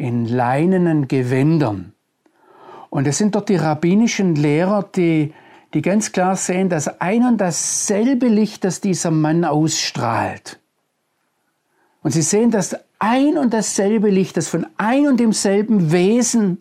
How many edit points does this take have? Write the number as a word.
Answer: one